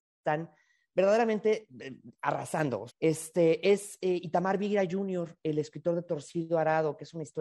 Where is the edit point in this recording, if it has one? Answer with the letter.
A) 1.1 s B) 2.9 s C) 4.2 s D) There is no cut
B